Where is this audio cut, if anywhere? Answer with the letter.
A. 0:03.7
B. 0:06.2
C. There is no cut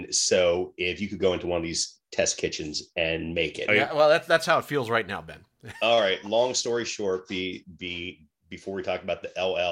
A